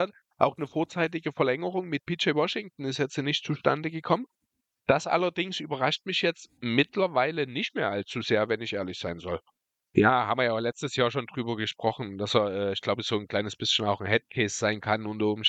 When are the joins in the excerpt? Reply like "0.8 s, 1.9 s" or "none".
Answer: 9.9 s